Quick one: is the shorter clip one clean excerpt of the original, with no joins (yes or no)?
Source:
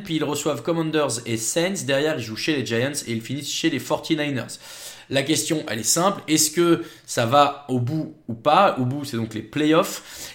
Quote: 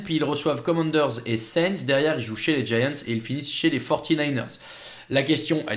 yes